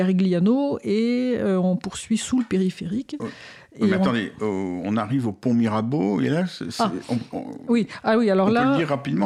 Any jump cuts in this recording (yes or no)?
no